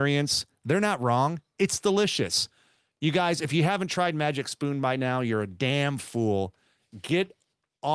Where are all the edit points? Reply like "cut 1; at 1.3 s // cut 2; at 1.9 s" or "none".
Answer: none